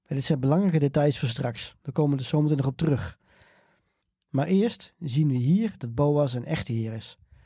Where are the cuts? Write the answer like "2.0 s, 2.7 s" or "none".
none